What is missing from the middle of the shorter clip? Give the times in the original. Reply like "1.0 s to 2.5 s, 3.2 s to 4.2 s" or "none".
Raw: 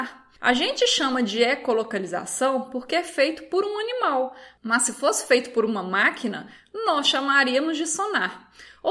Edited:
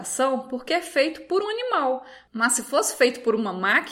3.6 s to 3.7 s

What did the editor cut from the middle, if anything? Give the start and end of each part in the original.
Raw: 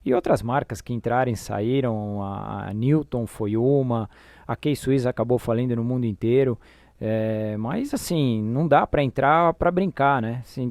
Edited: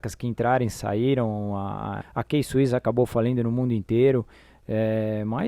2.7 s to 4.3 s

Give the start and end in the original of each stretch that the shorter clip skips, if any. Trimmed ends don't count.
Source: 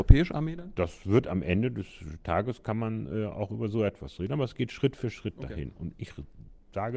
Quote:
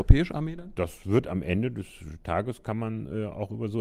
none

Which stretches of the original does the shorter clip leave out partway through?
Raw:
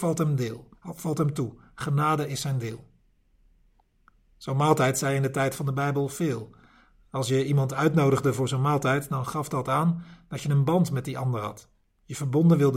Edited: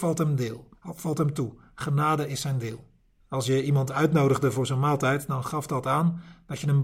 3.2 s to 7.0 s

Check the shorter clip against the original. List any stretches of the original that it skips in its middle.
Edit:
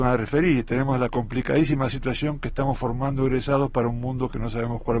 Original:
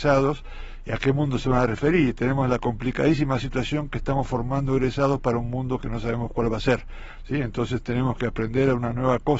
none

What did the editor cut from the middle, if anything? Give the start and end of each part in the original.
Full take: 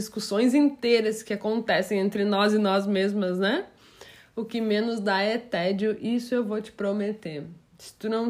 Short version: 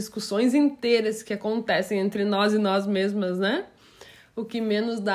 none

